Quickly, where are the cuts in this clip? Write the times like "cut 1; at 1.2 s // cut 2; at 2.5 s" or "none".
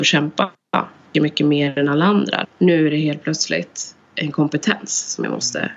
cut 1; at 1.1 s // cut 2; at 2.4 s